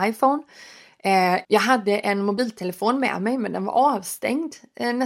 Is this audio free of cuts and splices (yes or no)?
no